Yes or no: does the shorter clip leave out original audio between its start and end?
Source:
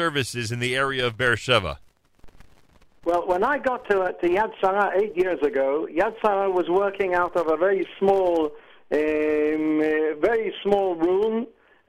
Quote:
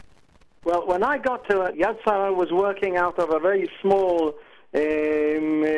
yes